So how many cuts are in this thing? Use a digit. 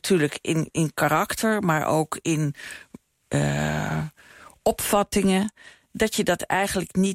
0